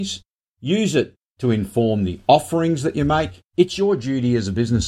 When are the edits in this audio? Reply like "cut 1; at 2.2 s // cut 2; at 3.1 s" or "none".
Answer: cut 1; at 3.5 s